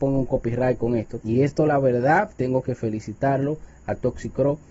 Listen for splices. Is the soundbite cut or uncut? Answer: cut